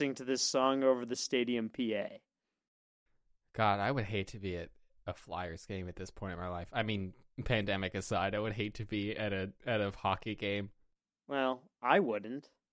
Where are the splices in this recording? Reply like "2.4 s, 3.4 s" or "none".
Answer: none